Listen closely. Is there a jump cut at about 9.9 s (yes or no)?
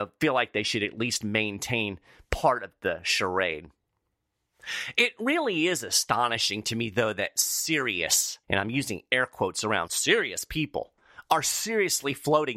yes